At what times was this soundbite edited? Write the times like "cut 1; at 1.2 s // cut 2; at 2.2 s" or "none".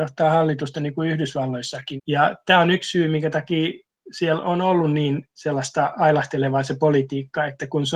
cut 1; at 2.0 s

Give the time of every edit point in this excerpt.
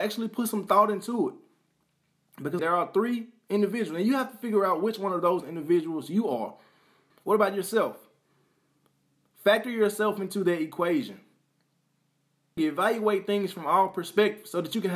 cut 1; at 2.6 s // cut 2; at 7.1 s // cut 3; at 12.6 s

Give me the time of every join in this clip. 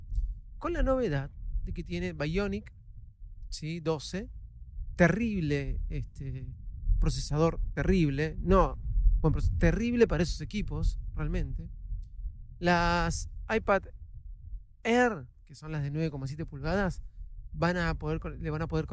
none

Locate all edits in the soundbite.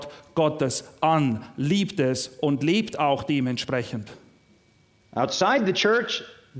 none

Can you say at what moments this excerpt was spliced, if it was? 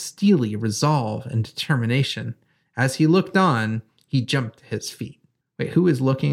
none

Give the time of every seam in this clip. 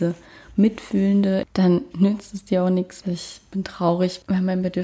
cut 1; at 1.4 s // cut 2; at 3.0 s

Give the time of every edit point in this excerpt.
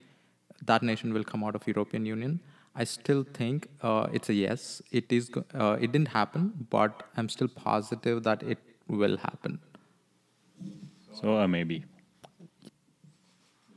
none

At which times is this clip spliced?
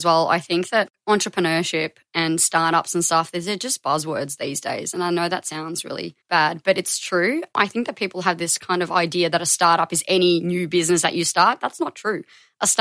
cut 1; at 6.2 s

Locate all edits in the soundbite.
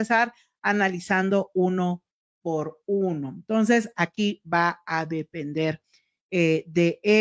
none

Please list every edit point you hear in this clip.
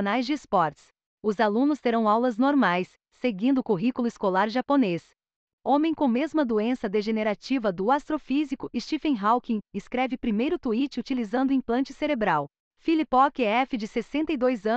cut 1; at 5.5 s

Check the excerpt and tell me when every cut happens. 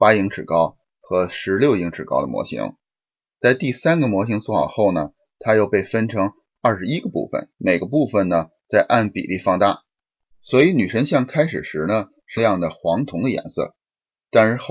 cut 1; at 7.5 s // cut 2; at 10.3 s // cut 3; at 12.4 s

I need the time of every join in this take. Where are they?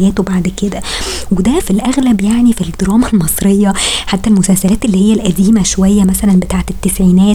cut 1; at 1.6 s

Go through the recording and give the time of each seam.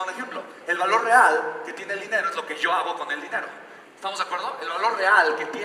cut 1; at 3.8 s

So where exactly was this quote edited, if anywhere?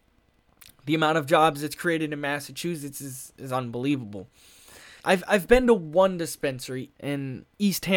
cut 1; at 5.0 s // cut 2; at 6.9 s

